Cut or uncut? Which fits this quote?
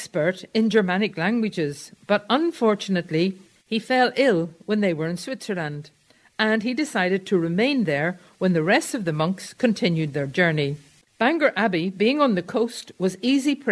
cut